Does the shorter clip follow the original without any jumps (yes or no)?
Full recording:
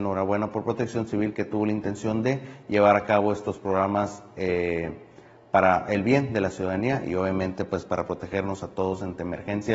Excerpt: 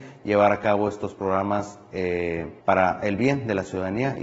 no